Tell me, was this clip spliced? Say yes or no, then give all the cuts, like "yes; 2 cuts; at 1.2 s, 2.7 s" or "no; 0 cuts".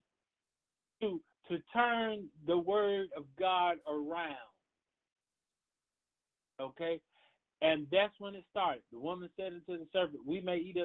no; 0 cuts